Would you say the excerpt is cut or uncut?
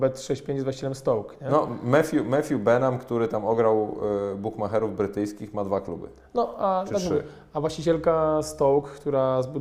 uncut